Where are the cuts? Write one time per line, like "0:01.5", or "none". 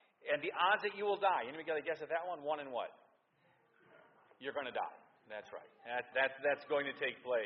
0:06.1